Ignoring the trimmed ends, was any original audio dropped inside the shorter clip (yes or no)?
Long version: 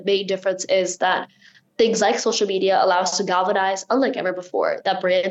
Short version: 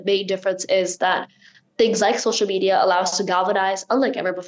no